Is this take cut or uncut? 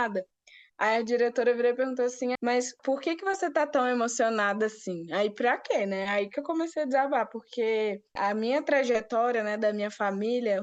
cut